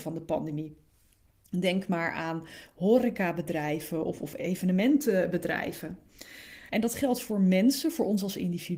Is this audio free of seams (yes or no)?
no